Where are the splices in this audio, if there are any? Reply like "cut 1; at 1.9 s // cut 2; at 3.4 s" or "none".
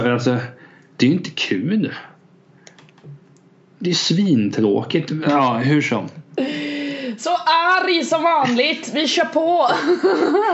cut 1; at 0.9 s // cut 2; at 5.2 s